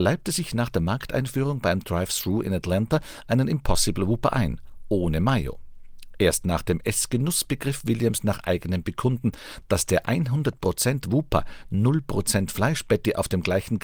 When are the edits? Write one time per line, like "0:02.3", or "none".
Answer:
none